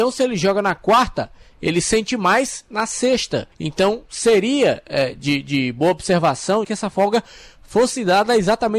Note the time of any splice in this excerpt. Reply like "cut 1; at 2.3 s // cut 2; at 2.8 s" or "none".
cut 1; at 3.5 s // cut 2; at 6.6 s